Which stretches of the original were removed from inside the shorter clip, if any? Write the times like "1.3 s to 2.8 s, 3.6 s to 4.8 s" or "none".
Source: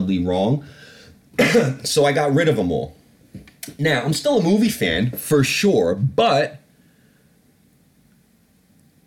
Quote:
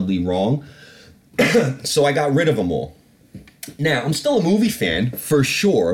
none